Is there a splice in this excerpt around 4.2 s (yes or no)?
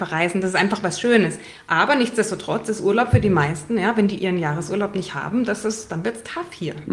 yes